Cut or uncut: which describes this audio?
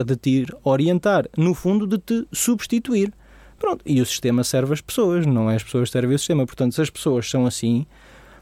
uncut